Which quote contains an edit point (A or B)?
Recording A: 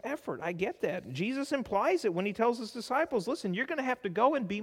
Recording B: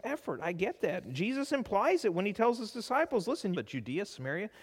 B